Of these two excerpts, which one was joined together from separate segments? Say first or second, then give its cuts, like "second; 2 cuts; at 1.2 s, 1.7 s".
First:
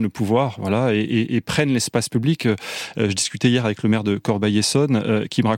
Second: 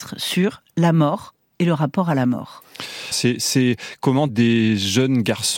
second; 2 cuts; at 3.1 s, 4.3 s